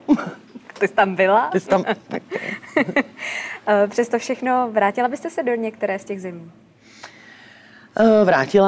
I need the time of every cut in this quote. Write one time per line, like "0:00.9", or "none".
none